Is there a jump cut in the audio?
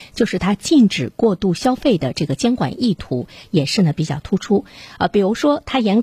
no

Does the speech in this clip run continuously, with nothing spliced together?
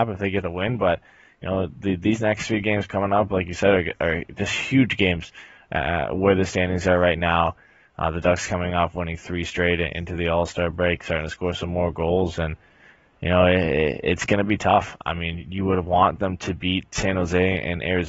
yes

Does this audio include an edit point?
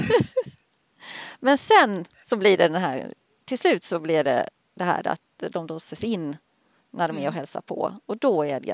no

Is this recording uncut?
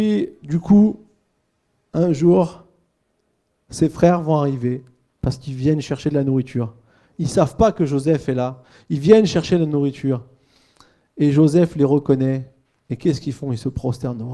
yes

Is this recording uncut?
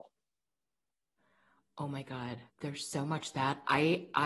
no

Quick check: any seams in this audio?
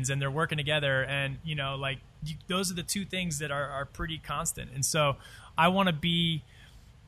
no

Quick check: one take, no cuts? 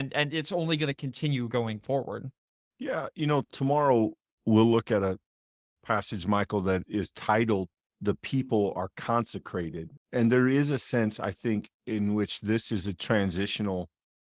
no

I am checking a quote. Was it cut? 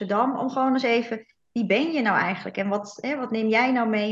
no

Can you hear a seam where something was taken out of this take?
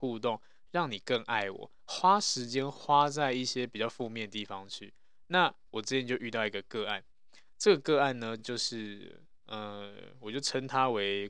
no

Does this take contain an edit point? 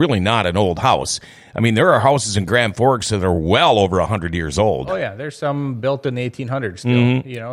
no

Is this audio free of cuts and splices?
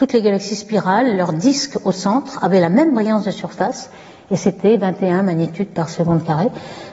yes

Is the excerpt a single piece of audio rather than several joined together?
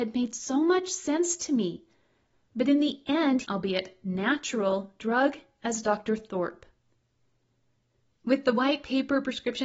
no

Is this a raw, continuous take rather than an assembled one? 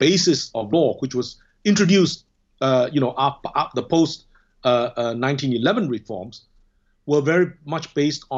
yes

